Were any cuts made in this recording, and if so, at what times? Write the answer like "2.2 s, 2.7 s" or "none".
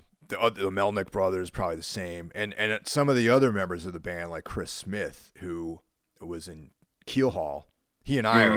none